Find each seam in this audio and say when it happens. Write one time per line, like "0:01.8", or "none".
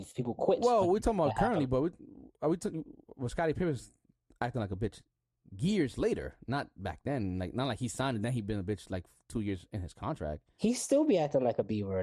none